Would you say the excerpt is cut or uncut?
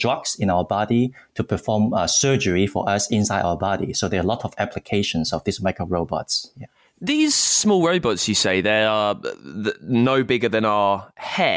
uncut